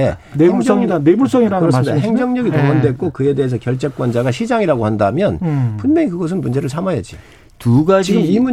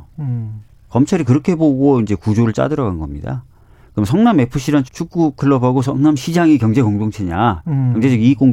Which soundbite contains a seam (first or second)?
second